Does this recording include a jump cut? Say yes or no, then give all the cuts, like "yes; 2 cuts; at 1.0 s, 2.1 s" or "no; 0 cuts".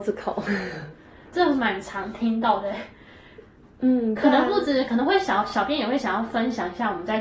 no; 0 cuts